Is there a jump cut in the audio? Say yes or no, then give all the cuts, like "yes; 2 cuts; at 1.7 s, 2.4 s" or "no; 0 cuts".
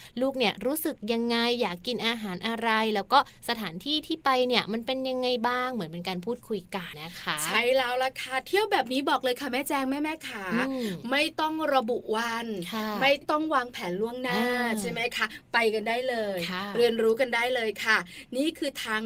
yes; 1 cut; at 6.9 s